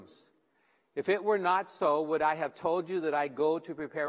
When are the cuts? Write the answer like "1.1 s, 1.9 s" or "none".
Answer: none